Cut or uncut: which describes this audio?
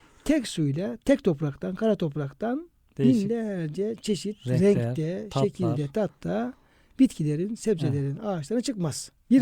uncut